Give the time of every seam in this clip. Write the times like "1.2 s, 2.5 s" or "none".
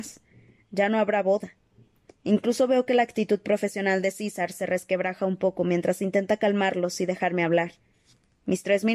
none